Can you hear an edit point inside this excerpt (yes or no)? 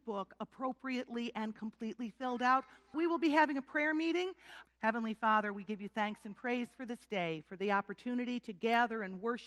yes